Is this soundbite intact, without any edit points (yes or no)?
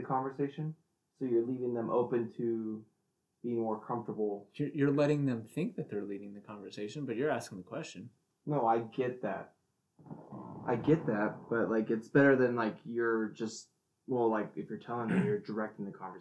yes